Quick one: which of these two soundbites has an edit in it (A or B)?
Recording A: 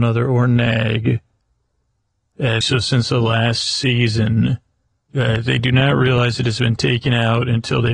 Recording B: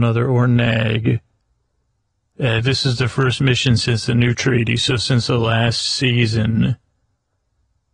A